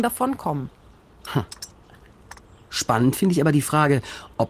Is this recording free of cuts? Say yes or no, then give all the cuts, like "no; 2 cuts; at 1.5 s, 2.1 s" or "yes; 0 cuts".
yes; 0 cuts